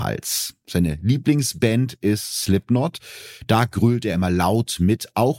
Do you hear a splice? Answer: no; 0 cuts

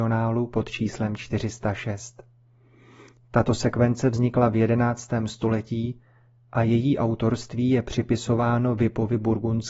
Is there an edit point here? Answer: no; 0 cuts

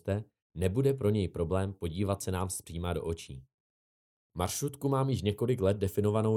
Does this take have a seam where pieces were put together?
yes; 1 cut; at 4.1 s

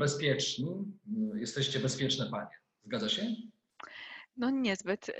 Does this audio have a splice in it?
no; 0 cuts

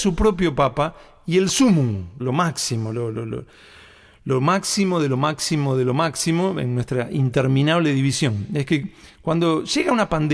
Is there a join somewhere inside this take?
yes; 1 cut; at 2.2 s

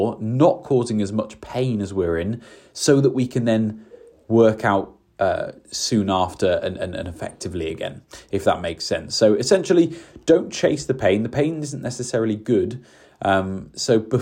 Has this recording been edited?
no; 0 cuts

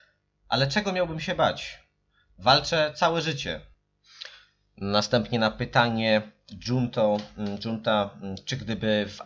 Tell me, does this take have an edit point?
no; 0 cuts

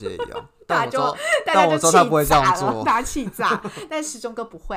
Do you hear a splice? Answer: no; 0 cuts

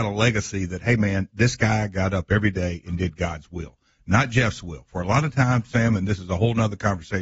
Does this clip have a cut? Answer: no; 0 cuts

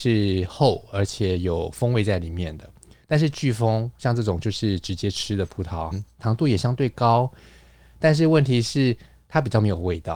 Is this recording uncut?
no; 1 cut; at 5.9 s

